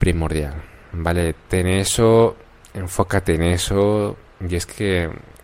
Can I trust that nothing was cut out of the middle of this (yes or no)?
yes